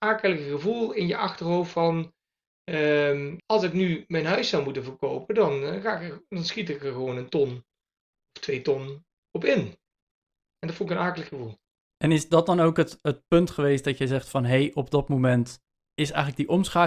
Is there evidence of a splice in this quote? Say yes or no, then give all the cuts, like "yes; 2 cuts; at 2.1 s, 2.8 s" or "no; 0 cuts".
yes; 1 cut; at 3.4 s